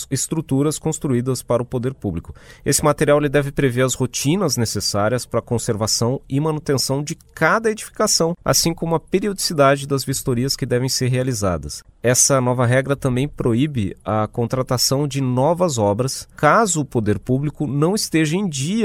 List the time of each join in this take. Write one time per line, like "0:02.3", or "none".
none